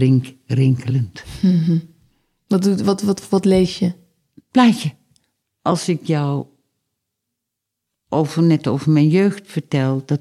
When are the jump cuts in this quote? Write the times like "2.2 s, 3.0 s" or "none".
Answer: 5.4 s